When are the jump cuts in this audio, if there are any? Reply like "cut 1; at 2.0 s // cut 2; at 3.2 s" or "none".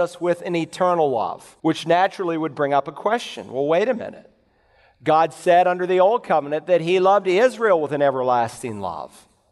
cut 1; at 1.6 s

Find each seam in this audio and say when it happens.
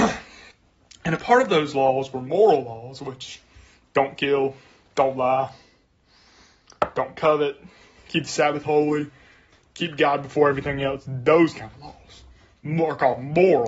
none

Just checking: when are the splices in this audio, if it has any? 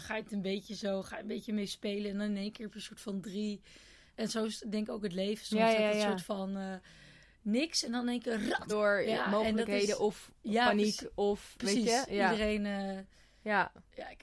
cut 1; at 8.7 s

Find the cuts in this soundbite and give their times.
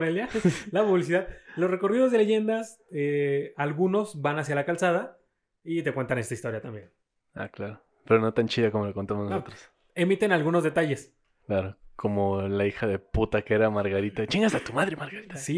none

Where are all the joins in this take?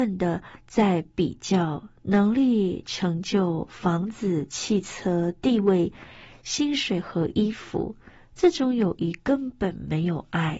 none

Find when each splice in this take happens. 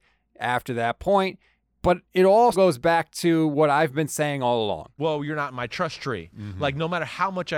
cut 1; at 2.5 s // cut 2; at 5.0 s

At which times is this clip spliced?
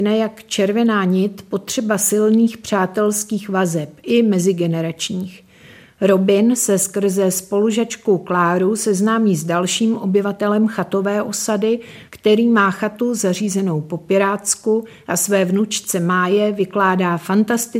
cut 1; at 12.1 s

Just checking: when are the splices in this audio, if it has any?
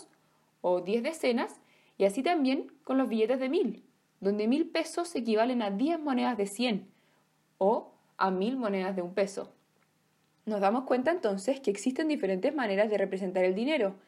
none

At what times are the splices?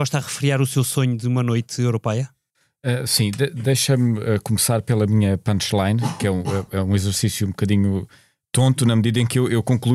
none

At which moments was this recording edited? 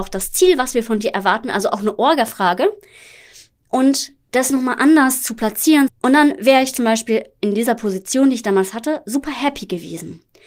cut 1; at 5.9 s

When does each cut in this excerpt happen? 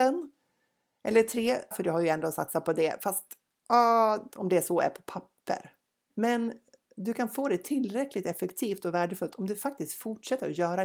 cut 1; at 1.7 s // cut 2; at 4.3 s // cut 3; at 6.1 s

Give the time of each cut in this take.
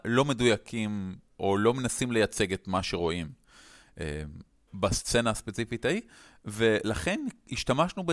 cut 1; at 4.7 s

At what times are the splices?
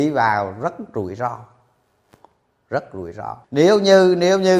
cut 1; at 3.4 s

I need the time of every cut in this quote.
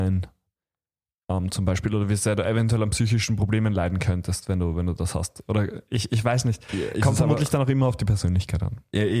none

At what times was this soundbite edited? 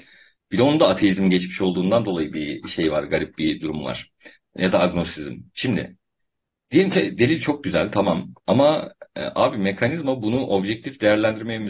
none

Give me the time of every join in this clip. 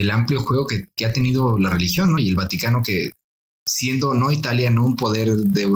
none

